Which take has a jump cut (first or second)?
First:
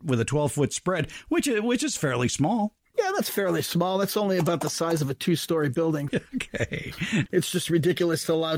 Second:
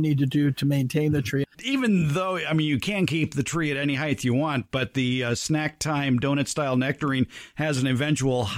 first